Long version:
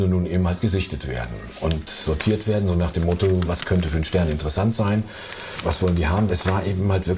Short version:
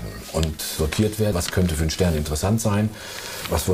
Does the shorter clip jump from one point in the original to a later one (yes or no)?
yes